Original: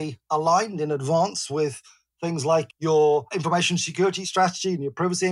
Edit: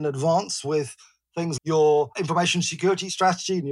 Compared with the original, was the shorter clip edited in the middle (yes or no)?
yes